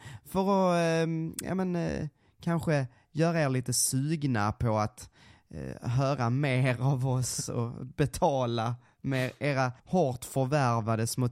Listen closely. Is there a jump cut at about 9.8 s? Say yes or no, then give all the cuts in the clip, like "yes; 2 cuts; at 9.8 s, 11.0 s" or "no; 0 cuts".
yes; 1 cut; at 9.8 s